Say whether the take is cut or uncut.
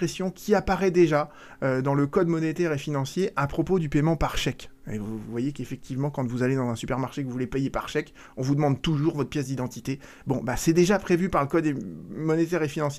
uncut